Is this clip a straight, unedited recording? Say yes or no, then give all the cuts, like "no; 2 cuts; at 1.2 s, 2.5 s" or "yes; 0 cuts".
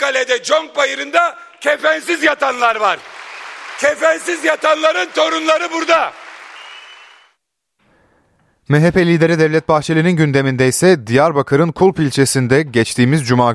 yes; 0 cuts